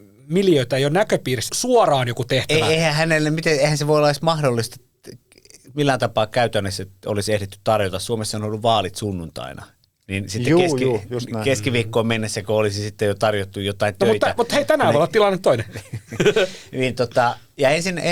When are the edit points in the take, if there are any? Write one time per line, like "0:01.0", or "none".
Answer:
0:01.5